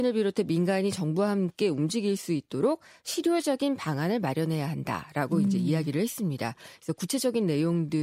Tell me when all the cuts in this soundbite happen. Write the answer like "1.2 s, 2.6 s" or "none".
none

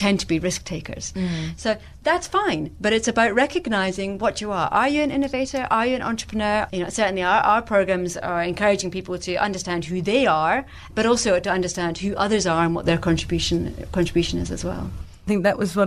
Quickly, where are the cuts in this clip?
6.7 s, 10.9 s

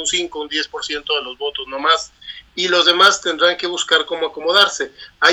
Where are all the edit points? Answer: none

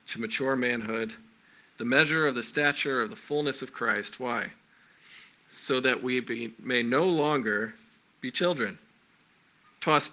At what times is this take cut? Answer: none

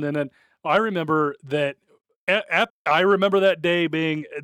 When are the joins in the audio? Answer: 2.7 s

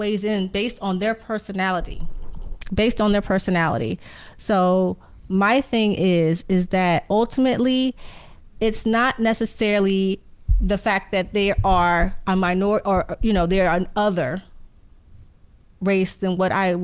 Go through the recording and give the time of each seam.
none

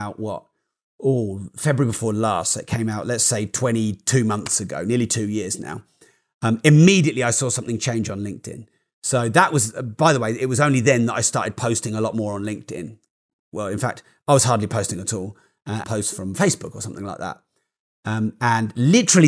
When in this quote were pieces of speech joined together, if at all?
15.8 s

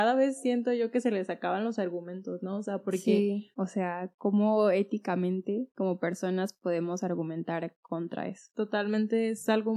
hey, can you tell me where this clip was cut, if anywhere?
3.5 s

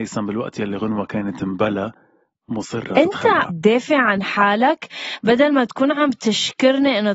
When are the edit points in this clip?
3.5 s

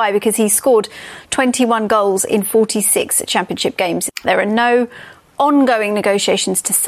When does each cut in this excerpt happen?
4.2 s

